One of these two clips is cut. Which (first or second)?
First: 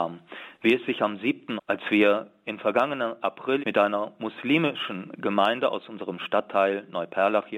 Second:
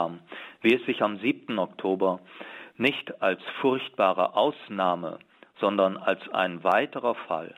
first